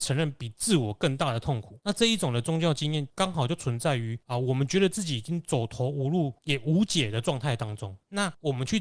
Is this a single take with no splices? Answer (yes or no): yes